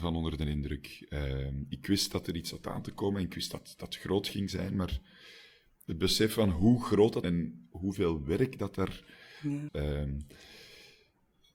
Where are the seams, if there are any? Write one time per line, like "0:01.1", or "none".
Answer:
0:07.2
0:09.7